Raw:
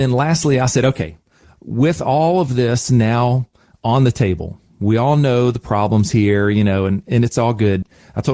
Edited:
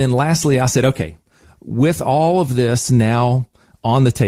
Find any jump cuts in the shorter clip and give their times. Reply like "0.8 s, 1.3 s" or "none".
none